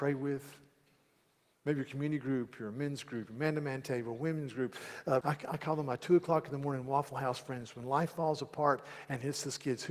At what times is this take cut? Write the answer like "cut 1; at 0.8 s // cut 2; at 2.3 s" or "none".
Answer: cut 1; at 5.2 s